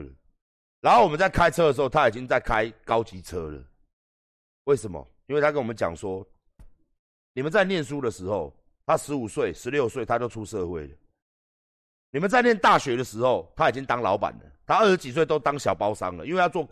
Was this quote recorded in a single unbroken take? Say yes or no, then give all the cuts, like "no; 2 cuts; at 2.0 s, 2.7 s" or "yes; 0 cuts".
yes; 0 cuts